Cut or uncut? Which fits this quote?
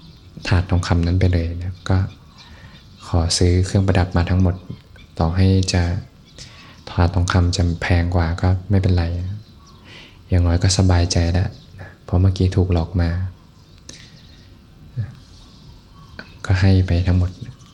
uncut